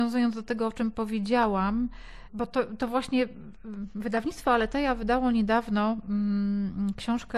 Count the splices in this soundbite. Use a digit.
0